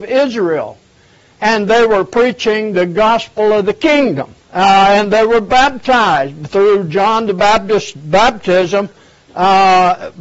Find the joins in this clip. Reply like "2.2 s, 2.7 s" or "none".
4.4 s